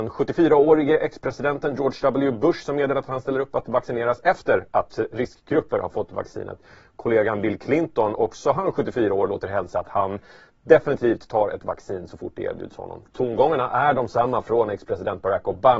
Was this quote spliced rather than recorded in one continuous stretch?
no; 0 cuts

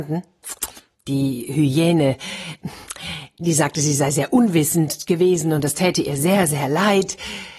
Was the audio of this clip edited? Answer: yes; 1 cut; at 0.9 s

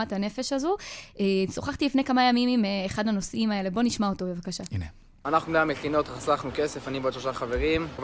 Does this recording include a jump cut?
no; 0 cuts

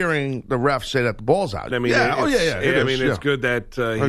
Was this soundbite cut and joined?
yes; 1 cut; at 1.7 s

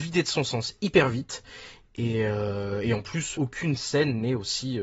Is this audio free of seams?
no; 1 cut; at 3.3 s

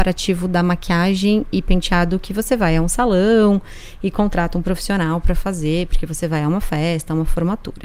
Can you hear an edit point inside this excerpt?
no; 0 cuts

